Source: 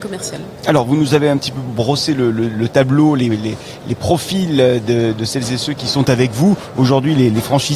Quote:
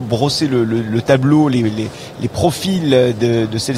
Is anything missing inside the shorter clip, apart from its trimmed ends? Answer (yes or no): no